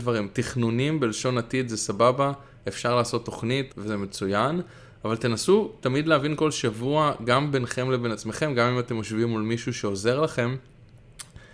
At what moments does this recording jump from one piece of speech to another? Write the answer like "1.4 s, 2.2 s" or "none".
3.7 s